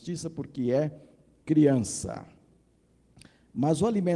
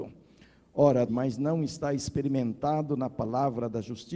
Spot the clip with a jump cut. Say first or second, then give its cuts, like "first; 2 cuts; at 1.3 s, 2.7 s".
second; 1 cut; at 1.1 s